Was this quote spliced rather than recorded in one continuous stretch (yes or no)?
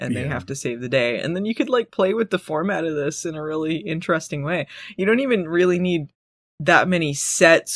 no